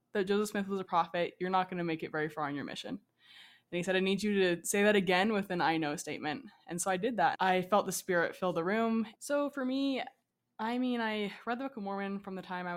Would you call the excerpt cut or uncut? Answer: cut